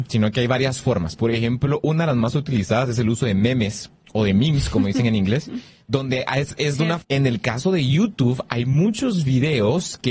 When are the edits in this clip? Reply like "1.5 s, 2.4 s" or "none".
7.0 s